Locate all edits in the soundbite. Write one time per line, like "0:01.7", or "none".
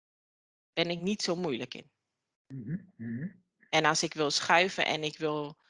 none